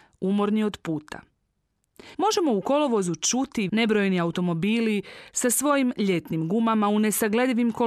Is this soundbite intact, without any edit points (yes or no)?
no